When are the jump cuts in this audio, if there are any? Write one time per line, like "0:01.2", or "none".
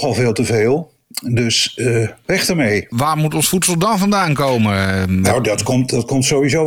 none